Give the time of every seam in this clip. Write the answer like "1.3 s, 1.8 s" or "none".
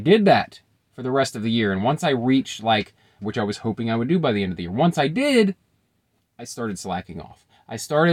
3.2 s